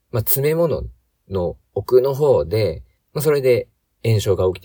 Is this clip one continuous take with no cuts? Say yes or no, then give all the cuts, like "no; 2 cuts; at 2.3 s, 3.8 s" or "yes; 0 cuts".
no; 1 cut; at 2.9 s